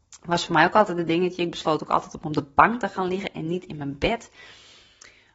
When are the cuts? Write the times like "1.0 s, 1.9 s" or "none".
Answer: none

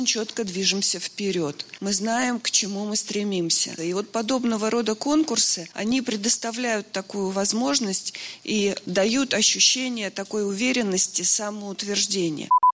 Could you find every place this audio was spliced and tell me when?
3.8 s

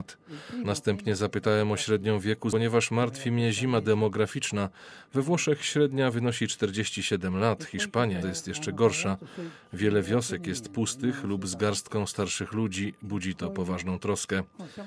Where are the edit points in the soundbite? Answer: 8.2 s

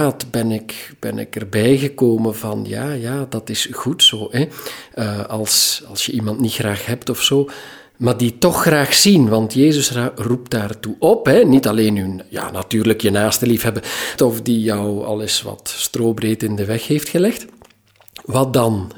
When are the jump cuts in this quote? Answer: 14.2 s

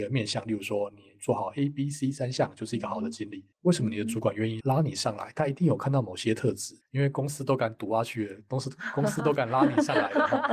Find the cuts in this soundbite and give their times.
3.5 s, 4.6 s, 6.8 s

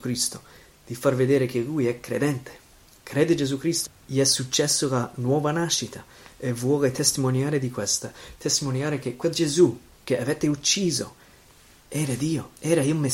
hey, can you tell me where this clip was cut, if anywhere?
3.8 s

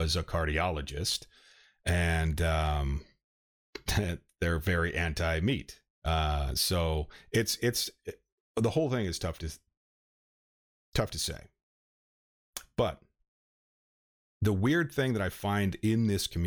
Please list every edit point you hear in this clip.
none

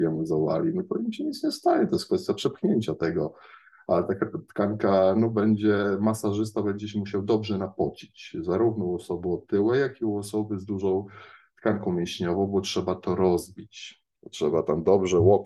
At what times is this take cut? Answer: none

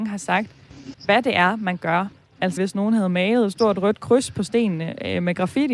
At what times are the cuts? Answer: 0.9 s, 2.6 s

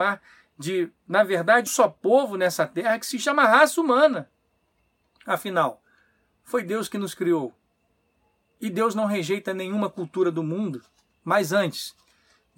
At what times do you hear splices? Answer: 1.7 s

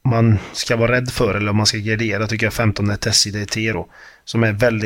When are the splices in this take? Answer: none

